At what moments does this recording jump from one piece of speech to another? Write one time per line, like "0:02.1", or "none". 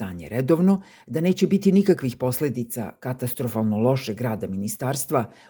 0:01.0